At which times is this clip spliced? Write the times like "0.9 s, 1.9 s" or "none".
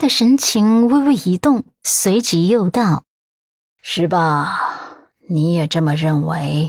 none

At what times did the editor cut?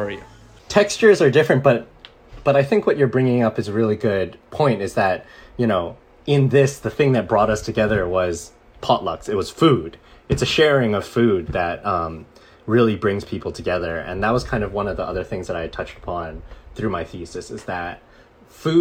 none

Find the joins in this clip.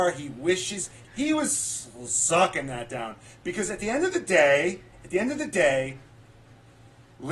1.0 s

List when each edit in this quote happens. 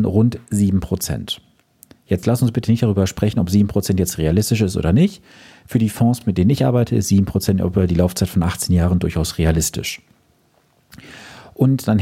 none

